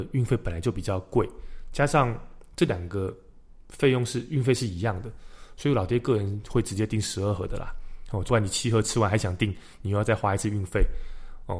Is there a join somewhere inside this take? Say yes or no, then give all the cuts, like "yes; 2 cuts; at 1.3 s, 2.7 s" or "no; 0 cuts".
yes; 1 cut; at 8.3 s